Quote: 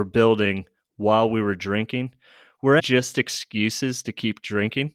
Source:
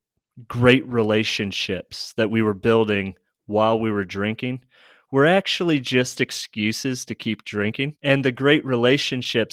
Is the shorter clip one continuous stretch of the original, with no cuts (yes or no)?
no